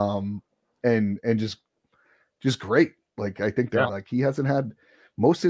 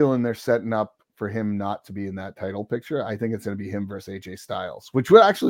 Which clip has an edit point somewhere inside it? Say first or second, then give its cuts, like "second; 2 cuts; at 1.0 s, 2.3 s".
first; 1 cut; at 3.9 s